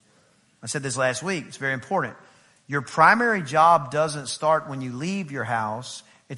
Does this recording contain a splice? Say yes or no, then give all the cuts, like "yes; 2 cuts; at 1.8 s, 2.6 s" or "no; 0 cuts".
no; 0 cuts